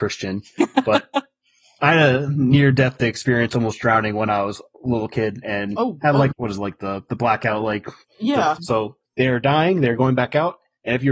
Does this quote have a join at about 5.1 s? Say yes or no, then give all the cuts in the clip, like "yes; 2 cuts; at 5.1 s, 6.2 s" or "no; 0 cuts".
no; 2 cuts; at 6.3 s, 8.6 s